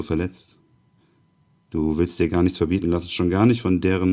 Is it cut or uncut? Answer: uncut